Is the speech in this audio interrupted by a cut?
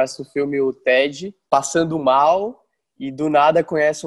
yes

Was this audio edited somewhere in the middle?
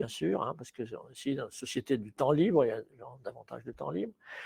no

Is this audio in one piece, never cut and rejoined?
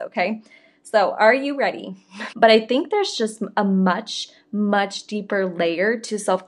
no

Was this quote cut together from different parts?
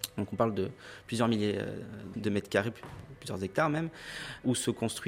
yes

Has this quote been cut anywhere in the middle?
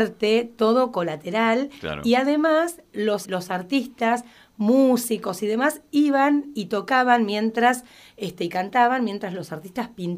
yes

